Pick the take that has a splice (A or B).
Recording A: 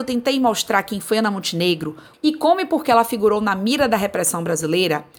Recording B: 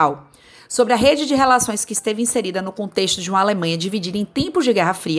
A